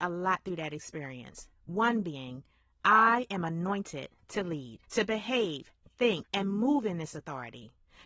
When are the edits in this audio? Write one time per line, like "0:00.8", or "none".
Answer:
0:04.8
0:06.3